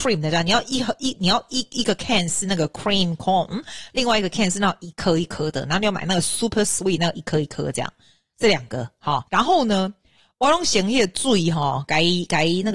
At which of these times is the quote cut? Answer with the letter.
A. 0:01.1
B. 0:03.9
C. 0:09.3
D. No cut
C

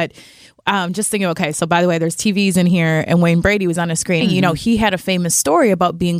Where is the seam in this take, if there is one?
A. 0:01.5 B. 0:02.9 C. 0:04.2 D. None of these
C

